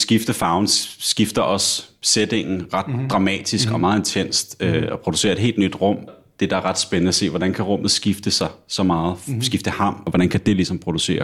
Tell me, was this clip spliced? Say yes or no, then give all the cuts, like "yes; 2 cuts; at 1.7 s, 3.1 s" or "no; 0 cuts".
no; 0 cuts